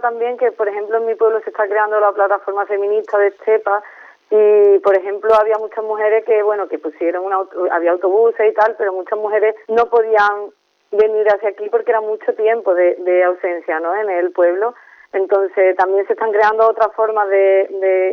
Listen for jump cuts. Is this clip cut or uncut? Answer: cut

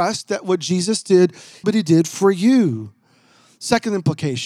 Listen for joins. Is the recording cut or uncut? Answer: cut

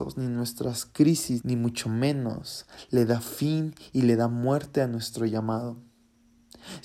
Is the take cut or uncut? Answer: cut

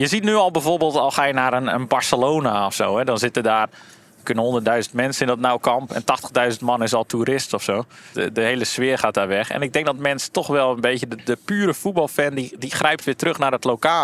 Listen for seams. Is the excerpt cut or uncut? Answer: uncut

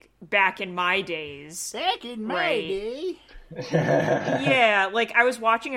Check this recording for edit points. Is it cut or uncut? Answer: uncut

